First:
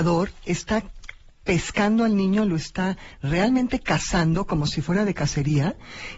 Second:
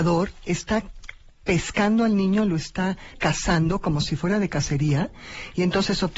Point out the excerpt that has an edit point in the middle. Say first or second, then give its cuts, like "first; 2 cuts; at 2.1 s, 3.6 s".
second; 1 cut; at 3.1 s